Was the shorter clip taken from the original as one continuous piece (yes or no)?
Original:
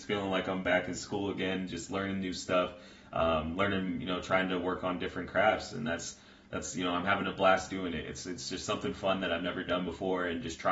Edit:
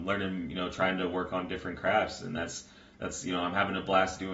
yes